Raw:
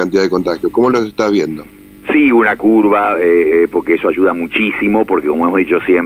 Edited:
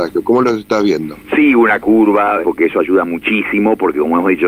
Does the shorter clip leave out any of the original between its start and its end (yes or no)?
yes